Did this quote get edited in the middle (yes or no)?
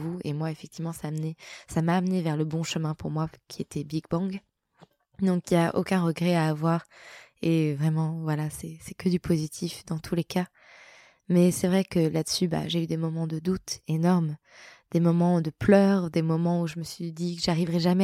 no